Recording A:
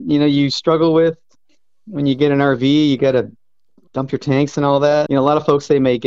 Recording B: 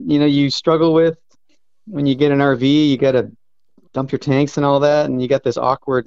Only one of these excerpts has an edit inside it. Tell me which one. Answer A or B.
A